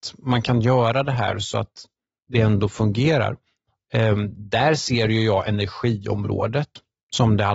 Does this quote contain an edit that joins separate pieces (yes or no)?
no